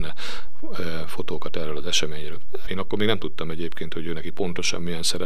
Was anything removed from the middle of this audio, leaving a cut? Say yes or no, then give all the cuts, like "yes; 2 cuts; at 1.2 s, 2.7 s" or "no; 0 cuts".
yes; 1 cut; at 2.7 s